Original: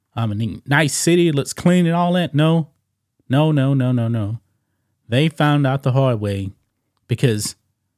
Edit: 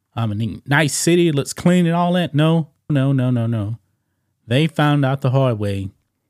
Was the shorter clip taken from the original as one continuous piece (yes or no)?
no